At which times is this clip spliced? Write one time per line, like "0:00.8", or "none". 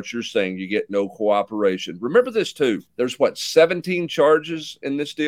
0:02.9